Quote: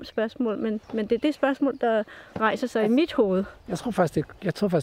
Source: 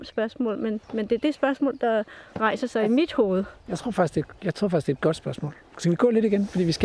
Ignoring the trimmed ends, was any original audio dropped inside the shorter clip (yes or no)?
no